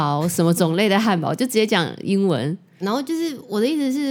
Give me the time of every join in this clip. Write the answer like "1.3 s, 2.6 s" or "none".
2.8 s